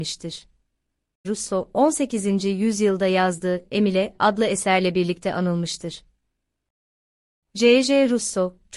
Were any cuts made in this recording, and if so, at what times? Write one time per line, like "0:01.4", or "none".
0:01.2

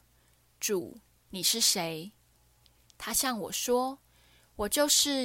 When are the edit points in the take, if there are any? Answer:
none

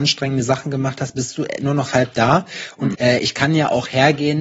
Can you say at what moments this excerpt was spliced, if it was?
0:02.9

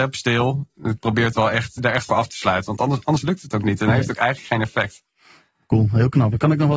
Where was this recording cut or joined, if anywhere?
0:01.8

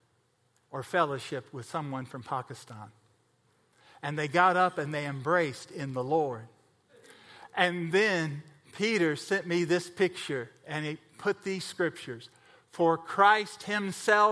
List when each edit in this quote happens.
none

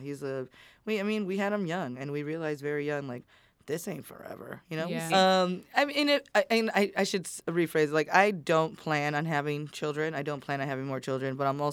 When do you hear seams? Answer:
0:05.1

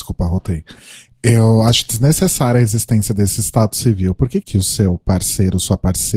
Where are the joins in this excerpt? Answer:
0:04.4

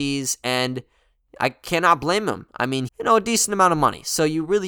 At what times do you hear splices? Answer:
0:02.9

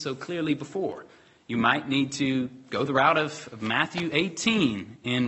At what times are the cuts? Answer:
none

